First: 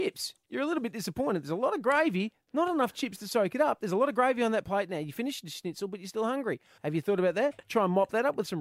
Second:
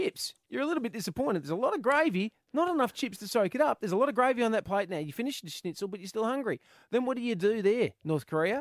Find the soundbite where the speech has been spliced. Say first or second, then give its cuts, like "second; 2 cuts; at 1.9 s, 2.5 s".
first; 1 cut; at 6.8 s